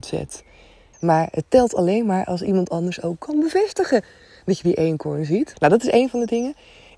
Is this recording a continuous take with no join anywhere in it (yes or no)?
no